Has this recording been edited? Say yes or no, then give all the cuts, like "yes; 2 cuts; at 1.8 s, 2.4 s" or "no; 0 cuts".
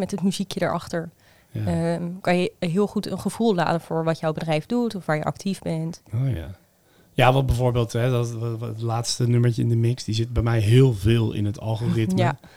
no; 0 cuts